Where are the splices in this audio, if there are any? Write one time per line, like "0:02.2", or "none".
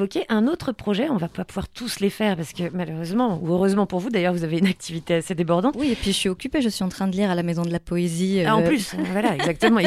none